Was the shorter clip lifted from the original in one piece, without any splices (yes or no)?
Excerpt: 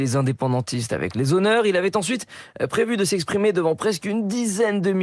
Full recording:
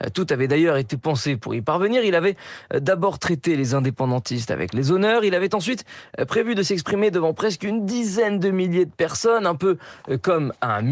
yes